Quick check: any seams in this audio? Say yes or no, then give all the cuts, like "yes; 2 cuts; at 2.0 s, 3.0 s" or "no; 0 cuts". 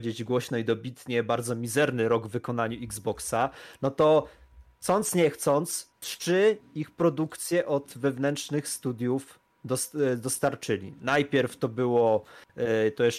no; 0 cuts